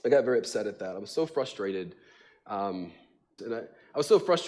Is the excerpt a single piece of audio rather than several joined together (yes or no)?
no